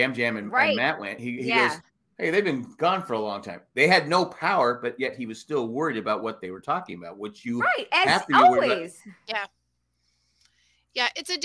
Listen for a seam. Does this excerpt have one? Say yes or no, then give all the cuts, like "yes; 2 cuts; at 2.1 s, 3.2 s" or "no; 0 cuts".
no; 0 cuts